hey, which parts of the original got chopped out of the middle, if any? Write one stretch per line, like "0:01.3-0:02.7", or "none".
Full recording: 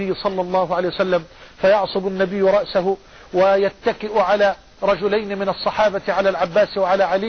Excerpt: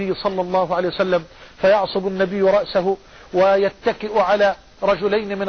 none